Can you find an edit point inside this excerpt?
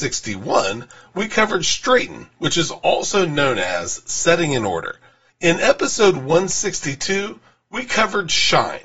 yes; 1 cut; at 5.3 s

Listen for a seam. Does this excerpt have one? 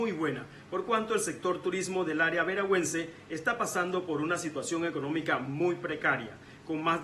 no; 0 cuts

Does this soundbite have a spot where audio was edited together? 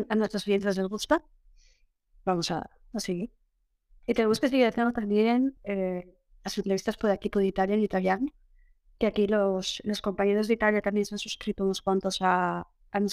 no; 0 cuts

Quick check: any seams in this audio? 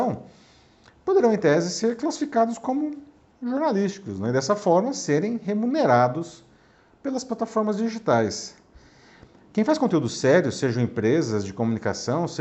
no; 0 cuts

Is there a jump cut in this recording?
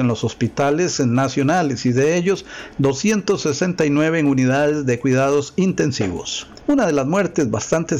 yes; 1 cut; at 6.6 s

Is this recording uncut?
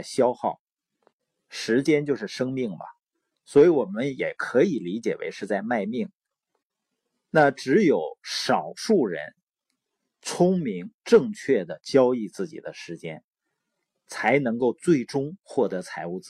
yes; 0 cuts

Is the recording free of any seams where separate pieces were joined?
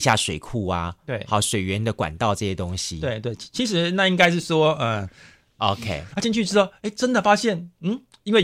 no; 1 cut; at 5.6 s

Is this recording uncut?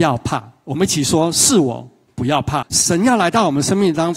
no; 1 cut; at 2.6 s

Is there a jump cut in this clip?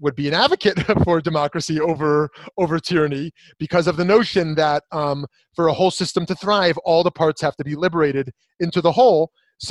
no; 0 cuts

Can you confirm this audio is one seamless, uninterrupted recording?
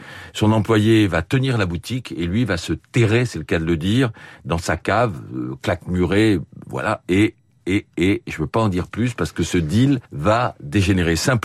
no; 1 cut; at 10.1 s

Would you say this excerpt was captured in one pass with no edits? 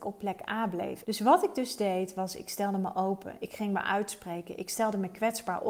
no; 1 cut; at 1.0 s

